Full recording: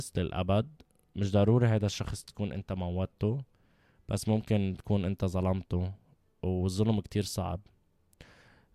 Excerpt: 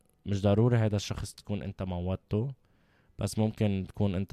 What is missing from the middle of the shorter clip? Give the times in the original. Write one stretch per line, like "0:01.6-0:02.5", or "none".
none

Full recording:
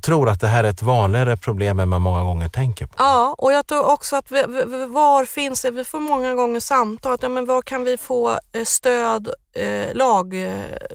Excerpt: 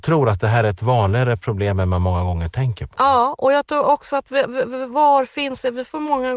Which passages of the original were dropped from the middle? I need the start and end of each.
none

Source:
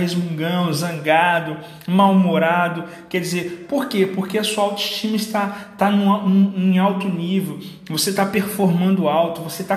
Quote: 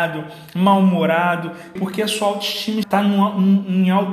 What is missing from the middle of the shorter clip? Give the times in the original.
0:03.1-0:04.1
0:05.2-0:05.7

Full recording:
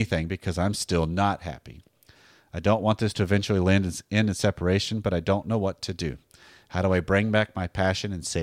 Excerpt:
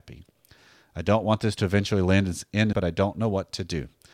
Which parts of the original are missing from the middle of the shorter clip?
0:04.3-0:05.0

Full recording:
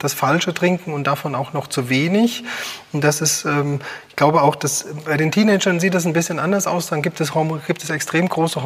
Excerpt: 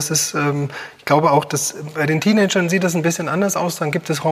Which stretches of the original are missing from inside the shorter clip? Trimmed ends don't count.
none

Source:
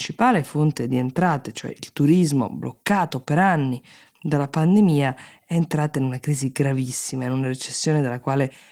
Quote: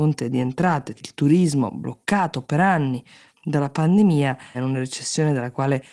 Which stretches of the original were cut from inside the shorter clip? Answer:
0:01.5-0:01.7
0:05.3-0:07.2

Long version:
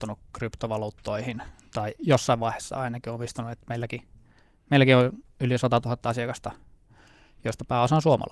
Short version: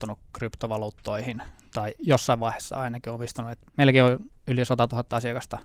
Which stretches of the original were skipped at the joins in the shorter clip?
0:03.7-0:04.6

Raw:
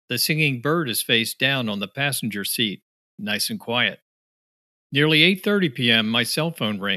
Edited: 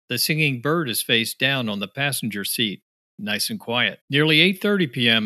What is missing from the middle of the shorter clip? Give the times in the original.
0:04.0-0:04.8

